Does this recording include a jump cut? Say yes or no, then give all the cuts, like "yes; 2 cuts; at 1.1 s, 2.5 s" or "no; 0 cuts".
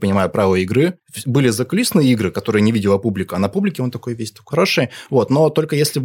yes; 1 cut; at 4.5 s